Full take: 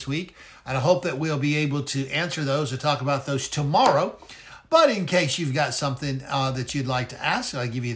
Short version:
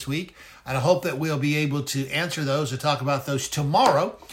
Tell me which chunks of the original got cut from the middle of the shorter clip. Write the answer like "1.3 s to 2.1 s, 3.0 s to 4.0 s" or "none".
none